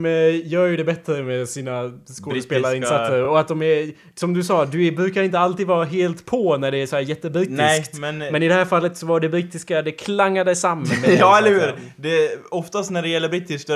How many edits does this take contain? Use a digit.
0